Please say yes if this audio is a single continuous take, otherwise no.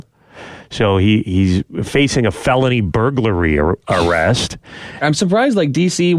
no